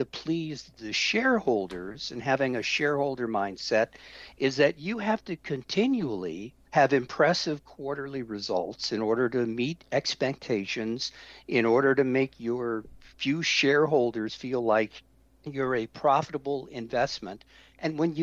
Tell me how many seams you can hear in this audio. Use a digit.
1